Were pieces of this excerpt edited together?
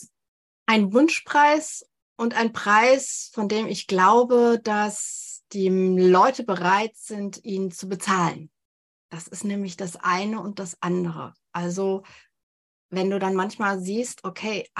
no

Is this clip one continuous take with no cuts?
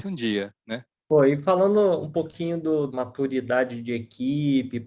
no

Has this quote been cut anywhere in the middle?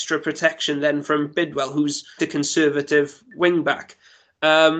yes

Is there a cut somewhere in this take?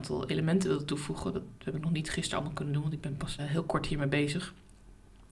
yes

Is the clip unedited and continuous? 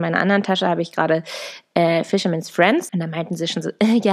no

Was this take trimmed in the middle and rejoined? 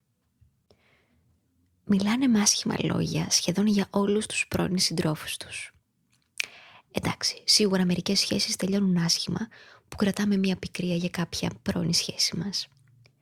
no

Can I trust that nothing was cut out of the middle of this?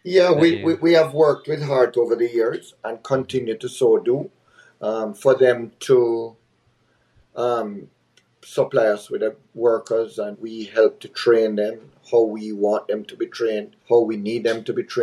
no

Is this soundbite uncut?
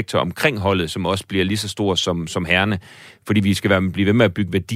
yes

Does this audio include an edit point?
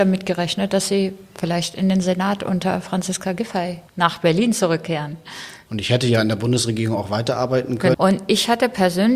yes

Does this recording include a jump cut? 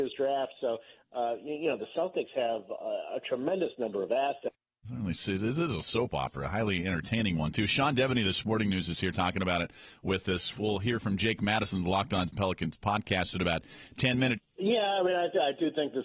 yes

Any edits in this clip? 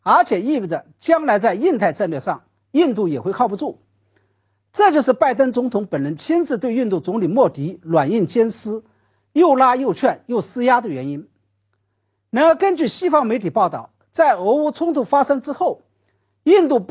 no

